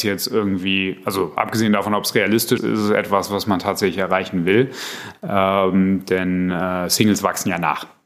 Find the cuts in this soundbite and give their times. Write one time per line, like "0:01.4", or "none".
0:02.6

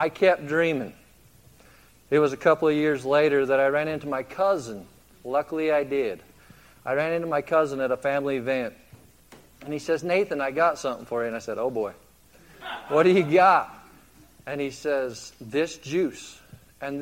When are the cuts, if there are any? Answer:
none

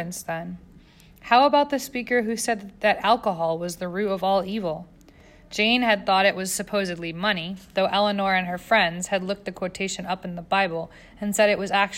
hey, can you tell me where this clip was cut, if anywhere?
none

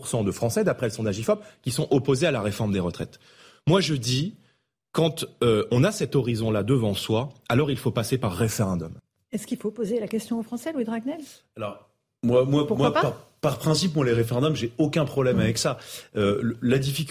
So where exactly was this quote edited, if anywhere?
none

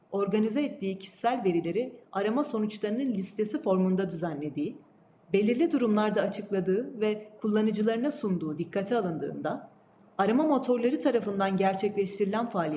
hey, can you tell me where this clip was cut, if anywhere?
0:05.2

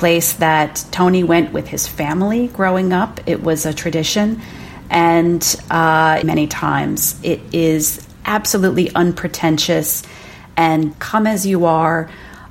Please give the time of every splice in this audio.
0:06.2
0:10.9

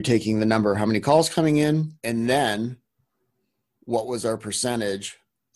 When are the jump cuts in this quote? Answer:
0:02.0

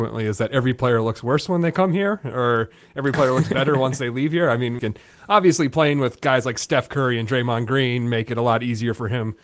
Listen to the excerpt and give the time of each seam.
0:04.8

